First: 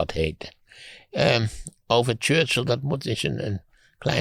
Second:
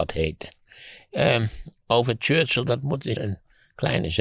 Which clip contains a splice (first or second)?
second